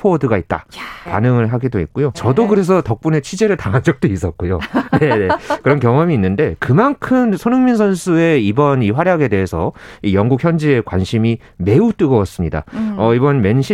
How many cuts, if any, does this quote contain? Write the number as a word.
two